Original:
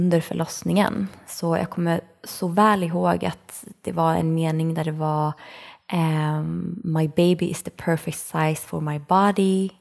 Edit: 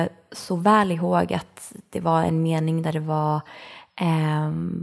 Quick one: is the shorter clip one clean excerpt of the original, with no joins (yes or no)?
yes